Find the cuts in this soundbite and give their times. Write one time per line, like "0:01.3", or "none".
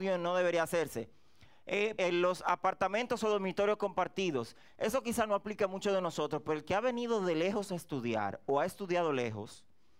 0:02.0